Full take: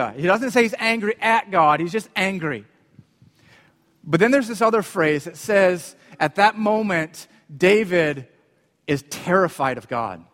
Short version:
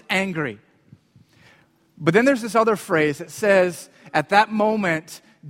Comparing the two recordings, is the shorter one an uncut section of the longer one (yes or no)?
yes